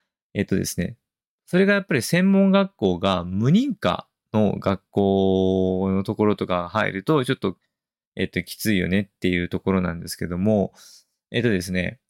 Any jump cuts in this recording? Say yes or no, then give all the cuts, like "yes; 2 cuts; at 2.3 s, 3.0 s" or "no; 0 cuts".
no; 0 cuts